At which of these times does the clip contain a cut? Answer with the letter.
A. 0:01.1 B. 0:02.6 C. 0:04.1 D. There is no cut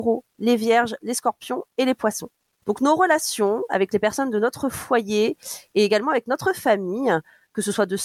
B